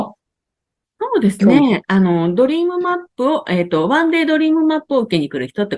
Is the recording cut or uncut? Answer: uncut